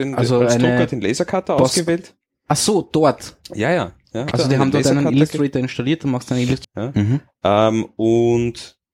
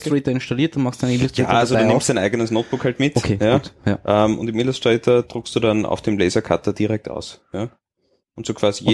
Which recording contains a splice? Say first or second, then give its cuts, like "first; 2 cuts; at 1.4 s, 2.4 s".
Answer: first; 2 cuts; at 4.3 s, 6.6 s